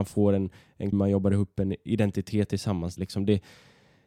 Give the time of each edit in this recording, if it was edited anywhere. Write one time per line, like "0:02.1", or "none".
0:00.9
0:03.0